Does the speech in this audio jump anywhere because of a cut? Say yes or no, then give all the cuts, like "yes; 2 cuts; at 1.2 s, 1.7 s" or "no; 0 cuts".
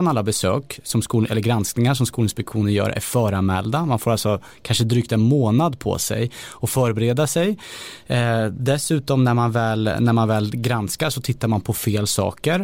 no; 0 cuts